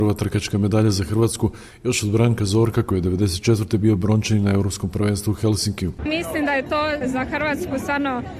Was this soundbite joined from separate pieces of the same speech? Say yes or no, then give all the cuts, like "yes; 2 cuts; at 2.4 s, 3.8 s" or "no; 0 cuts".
yes; 1 cut; at 7.0 s